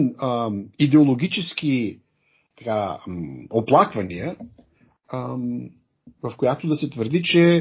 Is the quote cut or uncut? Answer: cut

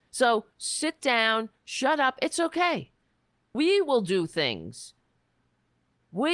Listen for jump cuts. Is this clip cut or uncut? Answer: cut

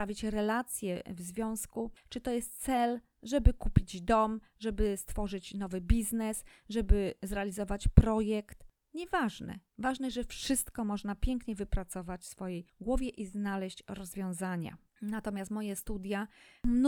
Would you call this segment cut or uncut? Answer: cut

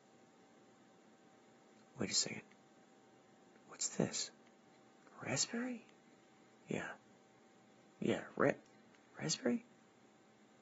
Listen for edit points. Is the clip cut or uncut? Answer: uncut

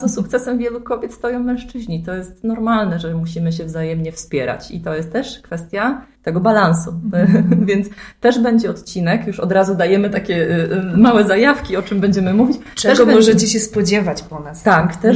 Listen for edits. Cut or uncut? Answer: cut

